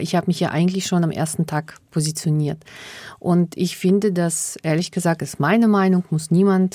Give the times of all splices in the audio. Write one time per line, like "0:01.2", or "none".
none